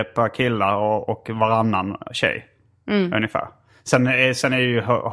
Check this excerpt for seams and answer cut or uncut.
uncut